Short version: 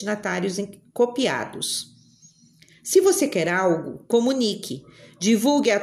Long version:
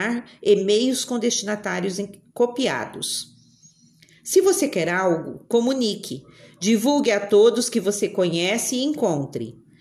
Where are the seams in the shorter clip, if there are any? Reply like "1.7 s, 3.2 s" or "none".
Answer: none

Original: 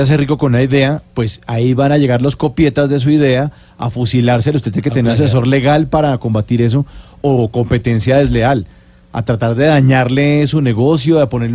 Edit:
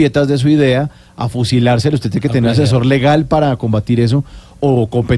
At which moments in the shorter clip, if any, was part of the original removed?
none

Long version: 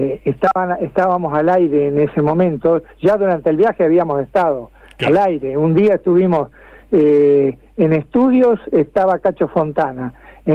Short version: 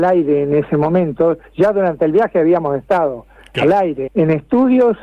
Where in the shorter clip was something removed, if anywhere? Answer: 4.1 s

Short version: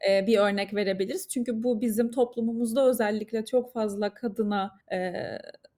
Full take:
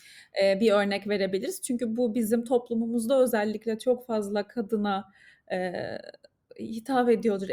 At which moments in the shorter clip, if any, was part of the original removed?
4.8 s

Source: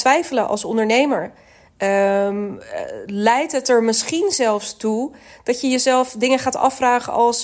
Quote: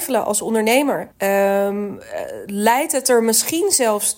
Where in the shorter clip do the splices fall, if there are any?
1.1 s

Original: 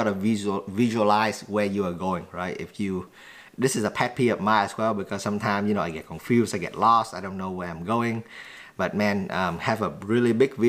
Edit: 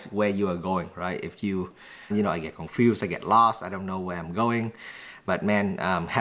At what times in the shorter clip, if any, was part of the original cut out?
2.1 s

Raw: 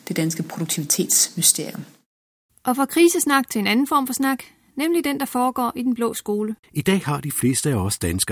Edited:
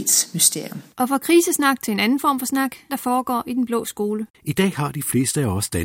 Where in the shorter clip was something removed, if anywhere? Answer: 0.9 s, 2.9 s

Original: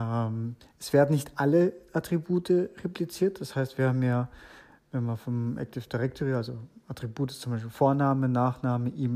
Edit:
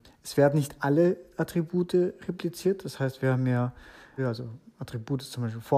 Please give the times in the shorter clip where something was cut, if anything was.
4.2 s

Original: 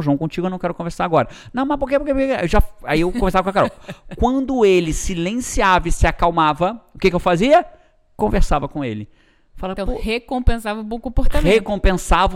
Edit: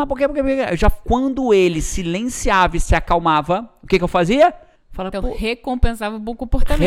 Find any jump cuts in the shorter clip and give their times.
1.0 s, 4.8 s

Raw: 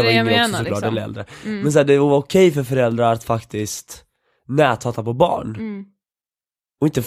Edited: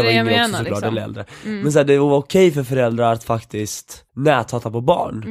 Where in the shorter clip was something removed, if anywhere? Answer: 4.1 s

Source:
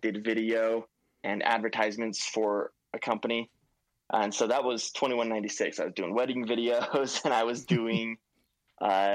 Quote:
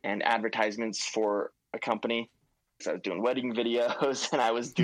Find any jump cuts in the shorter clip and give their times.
2.8 s

